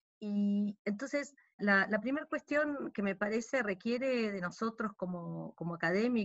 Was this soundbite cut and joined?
yes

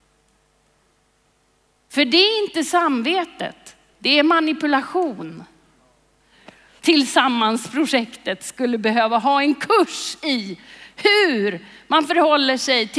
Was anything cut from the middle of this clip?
yes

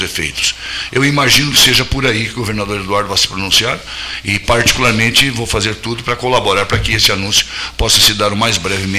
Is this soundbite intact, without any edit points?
yes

